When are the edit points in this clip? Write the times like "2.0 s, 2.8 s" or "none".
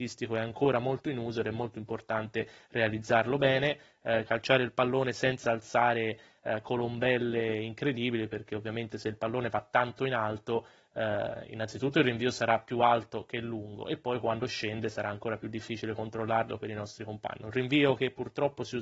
4.3 s, 17.4 s